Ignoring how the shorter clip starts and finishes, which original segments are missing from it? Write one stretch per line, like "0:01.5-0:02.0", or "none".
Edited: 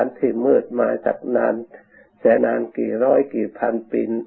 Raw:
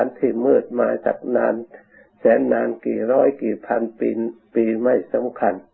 0:02.4-0:02.5